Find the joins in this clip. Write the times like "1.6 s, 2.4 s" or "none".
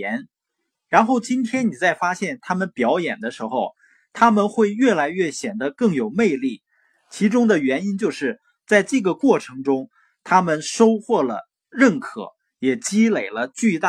none